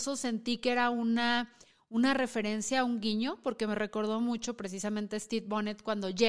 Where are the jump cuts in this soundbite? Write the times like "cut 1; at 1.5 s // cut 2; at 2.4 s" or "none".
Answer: none